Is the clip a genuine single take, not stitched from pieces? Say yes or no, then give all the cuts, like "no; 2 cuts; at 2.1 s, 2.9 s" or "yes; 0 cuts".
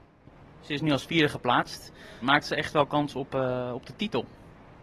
no; 1 cut; at 2.2 s